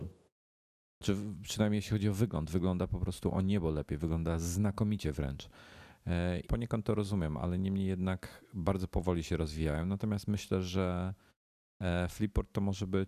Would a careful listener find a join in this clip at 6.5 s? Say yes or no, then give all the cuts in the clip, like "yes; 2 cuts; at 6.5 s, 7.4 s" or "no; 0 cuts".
yes; 1 cut; at 6.5 s